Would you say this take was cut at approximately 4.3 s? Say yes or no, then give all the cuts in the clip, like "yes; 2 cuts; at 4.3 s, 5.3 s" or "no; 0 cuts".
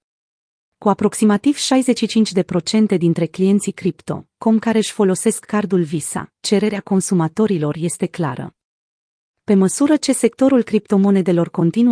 no; 0 cuts